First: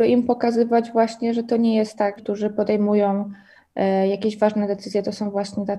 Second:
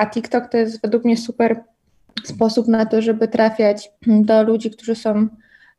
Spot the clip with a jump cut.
first; 1 cut; at 2.2 s

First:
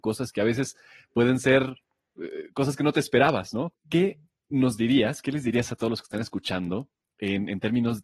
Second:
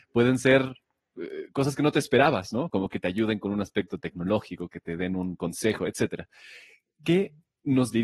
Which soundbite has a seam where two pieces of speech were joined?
first; 1 cut; at 3.7 s

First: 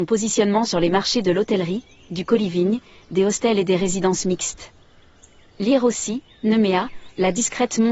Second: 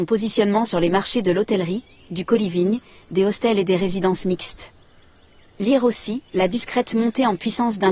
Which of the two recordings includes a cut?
second; 1 cut; at 6.3 s

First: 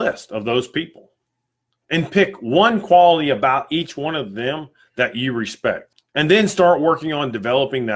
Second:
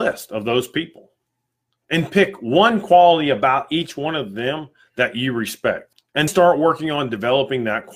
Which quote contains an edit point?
second; 1 cut; at 6.3 s

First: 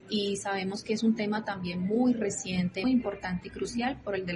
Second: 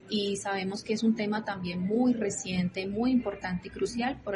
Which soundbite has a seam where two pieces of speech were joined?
first; 1 cut; at 2.8 s

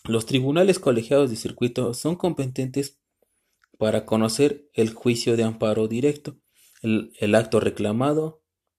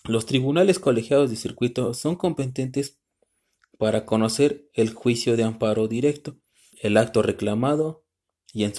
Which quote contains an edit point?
second; 1 cut; at 6.7 s

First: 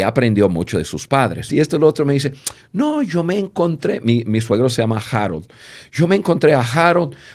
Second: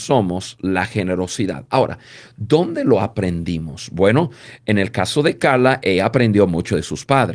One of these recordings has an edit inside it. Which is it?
first; 1 cut; at 1.5 s

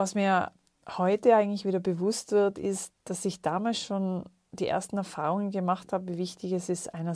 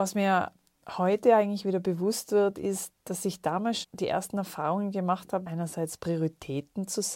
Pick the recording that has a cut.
second; 2 cuts; at 3.8 s, 5.4 s

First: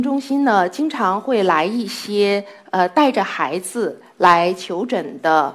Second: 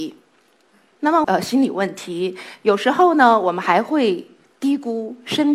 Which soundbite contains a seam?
second; 1 cut; at 1.2 s

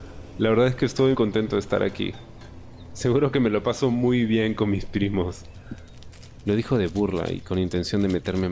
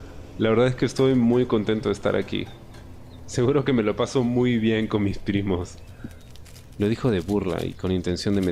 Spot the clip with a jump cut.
first; 1 cut; at 1.1 s

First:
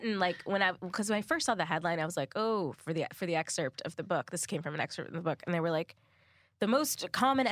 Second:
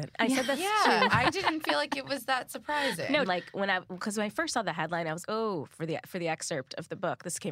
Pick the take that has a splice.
second; 2 cuts; at 3.3 s, 5.2 s

